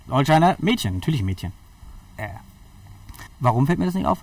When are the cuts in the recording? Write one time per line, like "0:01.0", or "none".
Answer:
0:02.2
0:03.3

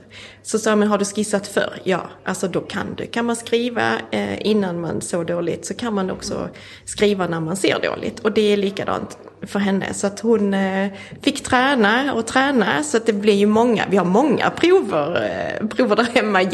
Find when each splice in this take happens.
none

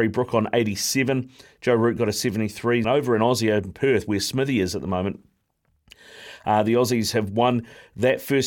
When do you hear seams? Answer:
0:02.8

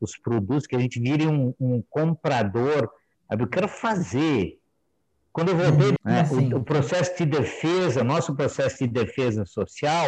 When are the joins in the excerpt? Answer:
0:03.1
0:06.0

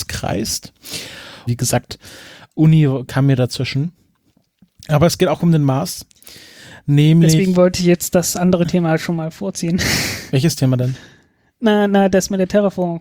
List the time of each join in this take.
0:01.5

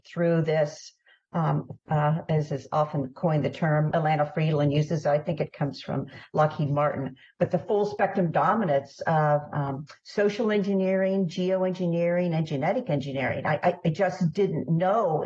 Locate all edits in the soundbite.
0:01.8
0:03.9

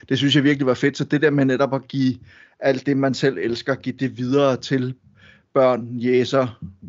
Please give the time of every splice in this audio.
none

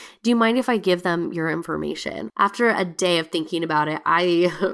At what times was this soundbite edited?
0:02.3

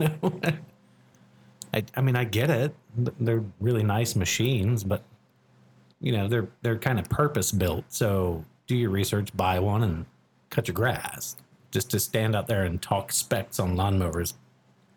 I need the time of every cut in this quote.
none

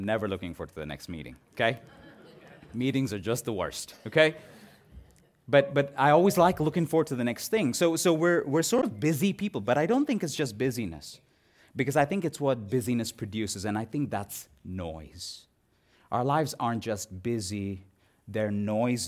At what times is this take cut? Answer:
none

